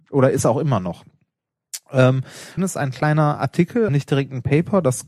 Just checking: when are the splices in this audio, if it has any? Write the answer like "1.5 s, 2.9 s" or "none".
2.6 s, 3.9 s